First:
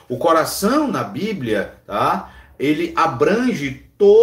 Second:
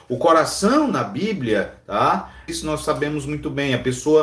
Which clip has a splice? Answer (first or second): second